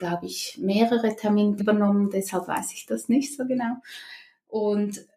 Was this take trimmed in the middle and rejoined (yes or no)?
yes